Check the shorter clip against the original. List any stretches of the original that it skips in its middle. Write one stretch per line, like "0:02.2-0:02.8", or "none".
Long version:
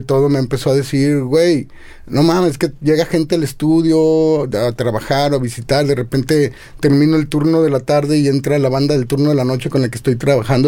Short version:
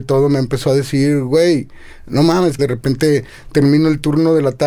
0:02.6-0:05.9